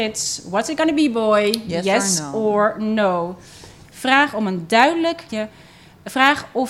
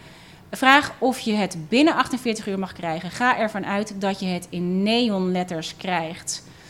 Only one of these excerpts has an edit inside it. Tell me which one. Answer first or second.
first